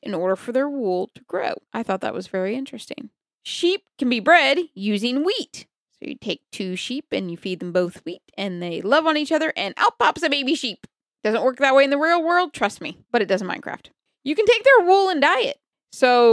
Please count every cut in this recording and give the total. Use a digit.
2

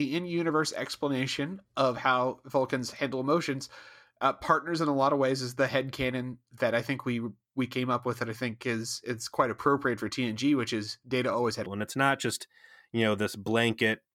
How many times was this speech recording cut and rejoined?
1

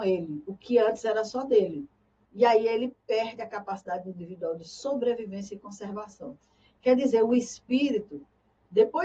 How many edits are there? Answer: 1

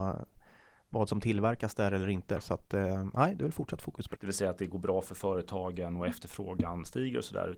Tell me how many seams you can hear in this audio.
1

